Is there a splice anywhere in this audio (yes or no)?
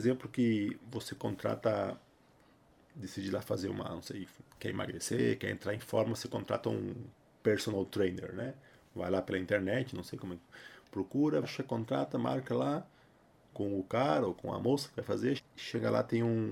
yes